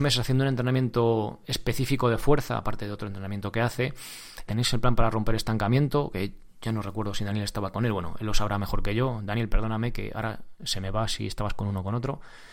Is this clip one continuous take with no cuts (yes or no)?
no